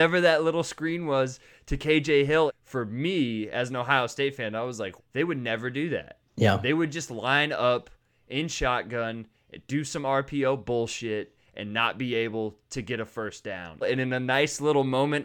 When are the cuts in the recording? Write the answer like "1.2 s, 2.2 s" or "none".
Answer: 2.5 s, 5.0 s, 13.8 s